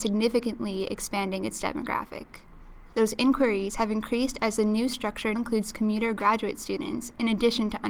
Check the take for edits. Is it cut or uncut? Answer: cut